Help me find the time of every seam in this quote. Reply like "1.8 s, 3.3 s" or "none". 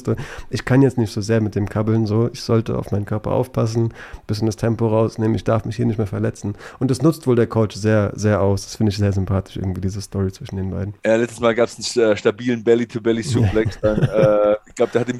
11.0 s